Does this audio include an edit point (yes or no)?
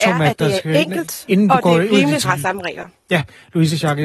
yes